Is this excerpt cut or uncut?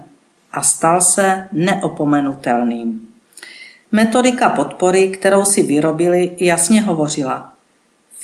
uncut